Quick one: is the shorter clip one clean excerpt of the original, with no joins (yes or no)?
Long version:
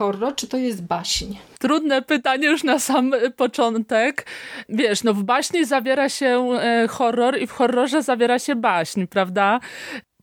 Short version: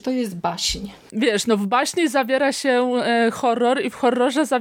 no